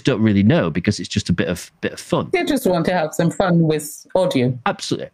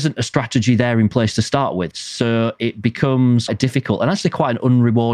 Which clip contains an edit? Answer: second; 2 cuts; at 1.9 s, 3.5 s

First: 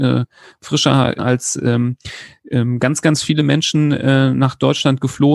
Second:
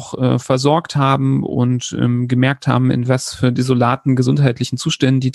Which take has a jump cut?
first; 1 cut; at 1.2 s

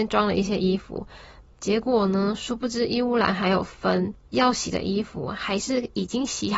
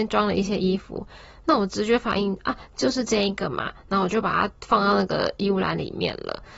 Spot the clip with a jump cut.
first; 1 cut; at 1.4 s

